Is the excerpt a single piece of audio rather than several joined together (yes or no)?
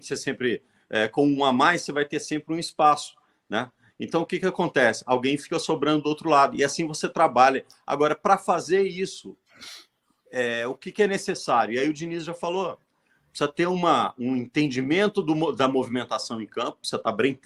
yes